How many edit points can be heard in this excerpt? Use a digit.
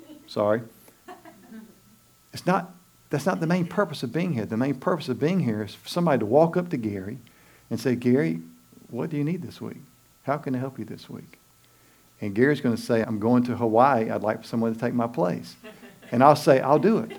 1